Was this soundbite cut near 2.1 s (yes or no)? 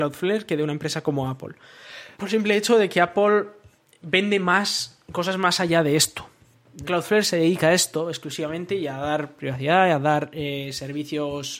yes